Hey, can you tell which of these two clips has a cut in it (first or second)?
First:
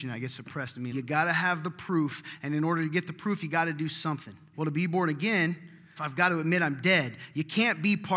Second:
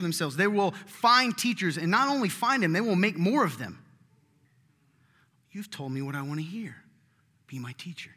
first